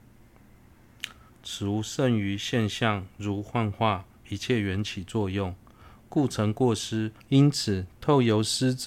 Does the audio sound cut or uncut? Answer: cut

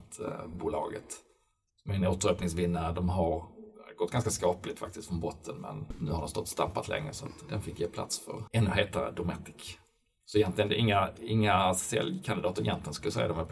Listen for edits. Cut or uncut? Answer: uncut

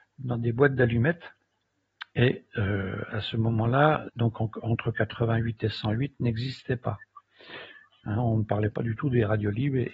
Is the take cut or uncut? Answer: cut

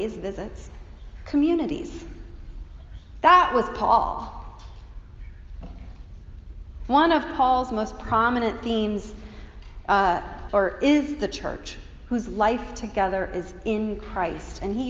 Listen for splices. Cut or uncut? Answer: cut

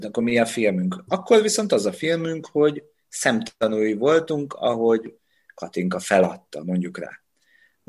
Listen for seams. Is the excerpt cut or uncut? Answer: uncut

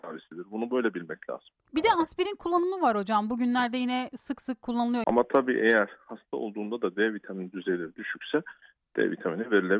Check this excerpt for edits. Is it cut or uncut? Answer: cut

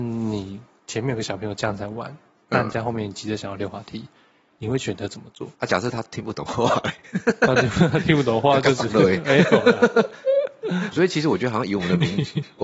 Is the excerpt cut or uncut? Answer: cut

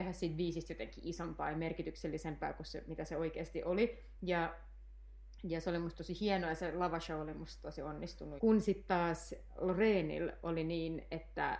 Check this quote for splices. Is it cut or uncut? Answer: cut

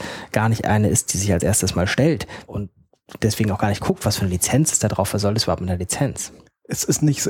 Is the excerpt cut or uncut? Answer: cut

